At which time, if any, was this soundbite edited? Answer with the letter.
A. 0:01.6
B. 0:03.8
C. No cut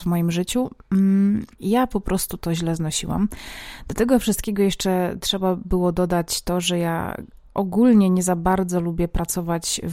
A